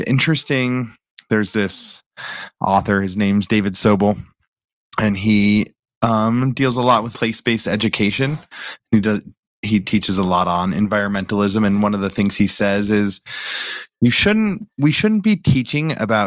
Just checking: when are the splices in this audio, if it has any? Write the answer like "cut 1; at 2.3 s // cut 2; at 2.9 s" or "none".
cut 1; at 7.1 s